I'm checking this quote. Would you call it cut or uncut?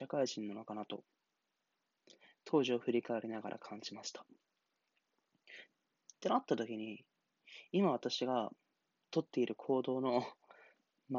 cut